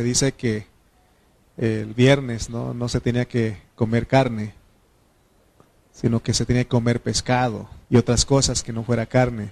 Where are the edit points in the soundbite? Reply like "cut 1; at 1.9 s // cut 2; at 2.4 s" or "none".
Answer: cut 1; at 7.8 s